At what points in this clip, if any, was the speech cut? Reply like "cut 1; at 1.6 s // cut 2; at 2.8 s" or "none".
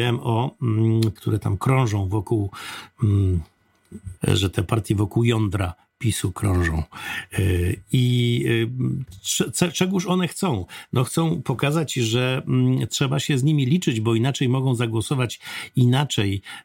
cut 1; at 1.2 s // cut 2; at 4.2 s

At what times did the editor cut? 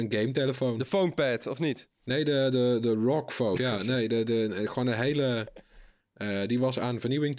cut 1; at 3.6 s // cut 2; at 6.0 s

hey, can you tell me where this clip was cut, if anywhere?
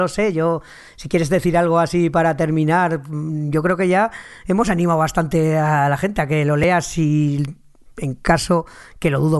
none

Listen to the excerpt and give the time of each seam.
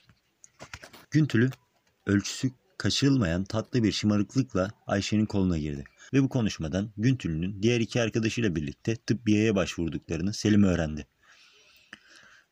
cut 1; at 1.0 s // cut 2; at 6.1 s

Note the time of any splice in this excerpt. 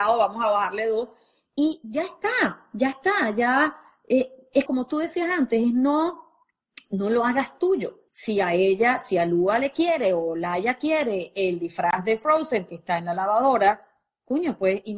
cut 1; at 4.7 s // cut 2; at 8.1 s

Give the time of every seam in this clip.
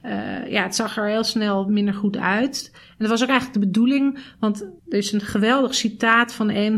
cut 1; at 4.8 s

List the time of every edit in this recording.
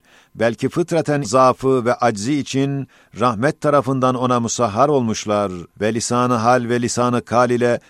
cut 1; at 5.7 s

